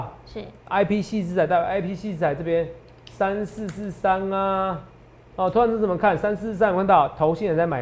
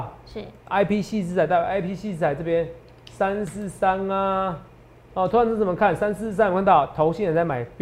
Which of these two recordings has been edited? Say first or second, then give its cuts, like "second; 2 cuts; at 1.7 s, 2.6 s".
second; 1 cut; at 3.5 s